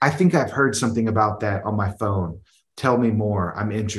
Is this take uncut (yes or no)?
yes